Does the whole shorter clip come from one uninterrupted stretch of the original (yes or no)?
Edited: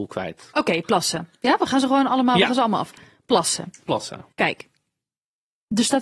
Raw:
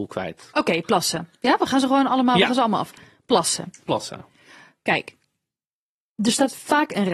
no